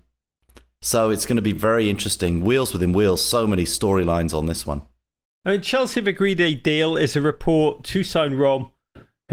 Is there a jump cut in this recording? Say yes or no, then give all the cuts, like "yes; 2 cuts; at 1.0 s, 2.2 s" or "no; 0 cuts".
no; 0 cuts